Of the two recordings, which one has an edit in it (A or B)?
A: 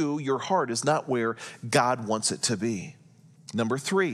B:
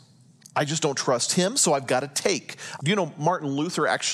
B